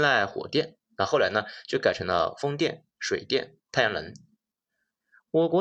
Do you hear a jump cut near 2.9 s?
no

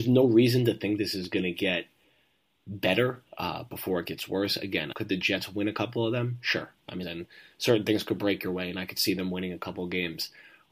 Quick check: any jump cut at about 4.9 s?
yes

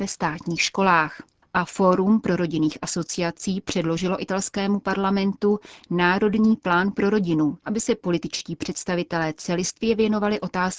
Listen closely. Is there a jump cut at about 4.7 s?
no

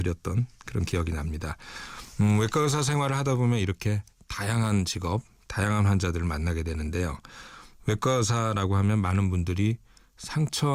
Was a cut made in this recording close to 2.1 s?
no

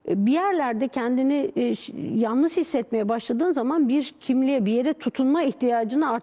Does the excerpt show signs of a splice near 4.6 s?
yes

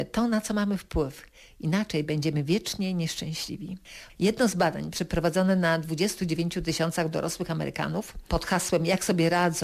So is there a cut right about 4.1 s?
yes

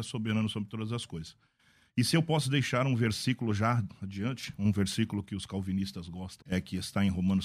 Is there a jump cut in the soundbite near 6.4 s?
yes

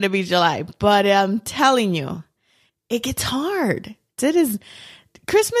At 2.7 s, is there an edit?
yes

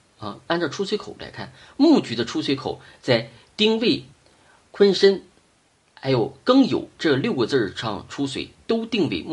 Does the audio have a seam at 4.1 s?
no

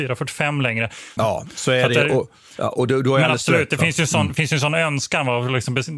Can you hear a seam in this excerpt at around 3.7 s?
no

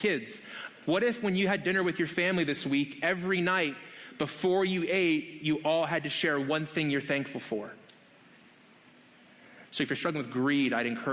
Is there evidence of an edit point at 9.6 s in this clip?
yes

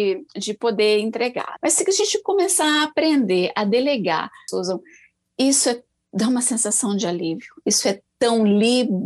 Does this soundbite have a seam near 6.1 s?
no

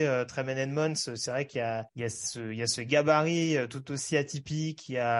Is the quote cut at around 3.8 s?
no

